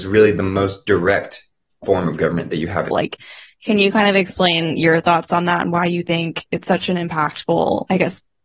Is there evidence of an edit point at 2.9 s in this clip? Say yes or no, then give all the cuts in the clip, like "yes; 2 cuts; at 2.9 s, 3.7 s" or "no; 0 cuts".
yes; 2 cuts; at 2.9 s, 6.5 s